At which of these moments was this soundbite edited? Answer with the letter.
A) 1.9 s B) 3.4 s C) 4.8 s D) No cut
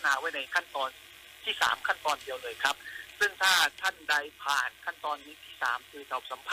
C